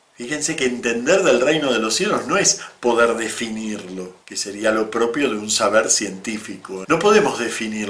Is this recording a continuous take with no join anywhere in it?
no; 2 cuts; at 4.2 s, 6.8 s

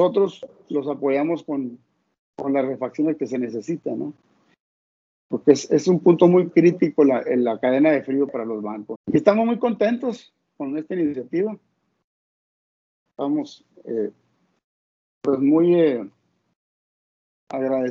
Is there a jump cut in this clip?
yes; 2 cuts; at 9.0 s, 13.1 s

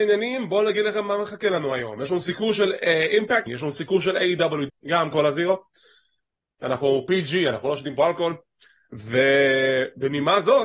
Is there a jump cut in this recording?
yes; 2 cuts; at 3.5 s, 4.7 s

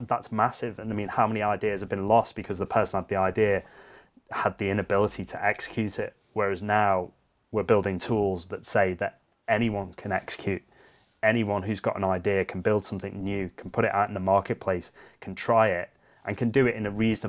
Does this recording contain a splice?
no; 0 cuts

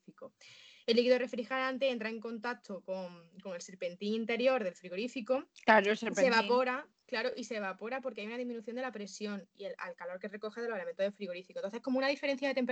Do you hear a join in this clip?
no; 0 cuts

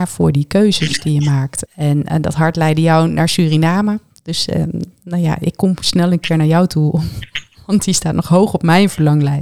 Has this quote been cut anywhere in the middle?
yes; 1 cut; at 1.7 s

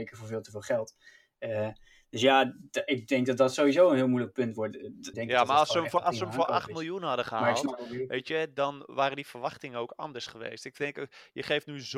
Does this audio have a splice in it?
yes; 1 cut; at 5.1 s

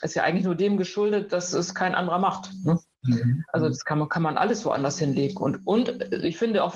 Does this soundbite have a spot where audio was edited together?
no; 0 cuts

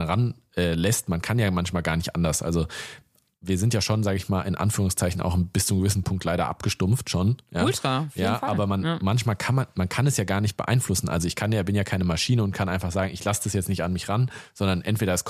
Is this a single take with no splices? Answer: yes; 0 cuts

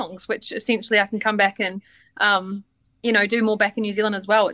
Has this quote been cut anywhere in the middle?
no; 0 cuts

